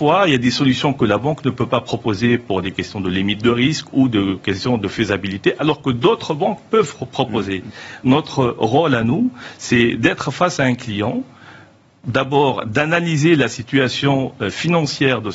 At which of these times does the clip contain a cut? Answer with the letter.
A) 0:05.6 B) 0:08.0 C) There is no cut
C